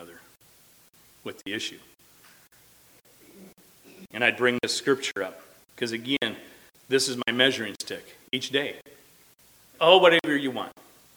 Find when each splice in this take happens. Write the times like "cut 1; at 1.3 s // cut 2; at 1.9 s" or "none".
cut 1; at 9.7 s